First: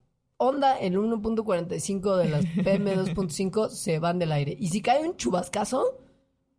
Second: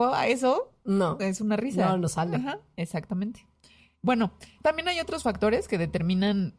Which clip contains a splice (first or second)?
second